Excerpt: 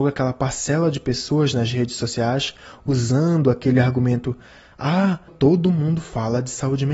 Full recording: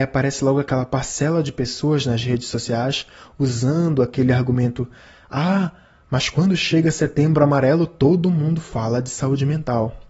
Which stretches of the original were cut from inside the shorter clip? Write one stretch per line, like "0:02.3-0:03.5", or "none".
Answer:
0:05.8-0:07.9